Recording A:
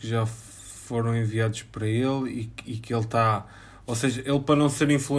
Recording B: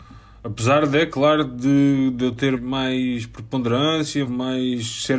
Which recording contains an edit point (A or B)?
B